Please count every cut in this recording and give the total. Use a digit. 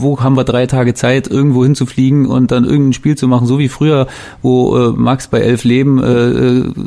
0